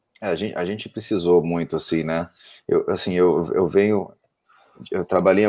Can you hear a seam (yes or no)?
no